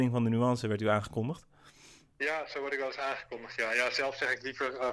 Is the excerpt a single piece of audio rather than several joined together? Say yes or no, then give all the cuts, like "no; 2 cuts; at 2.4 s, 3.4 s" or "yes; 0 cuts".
yes; 0 cuts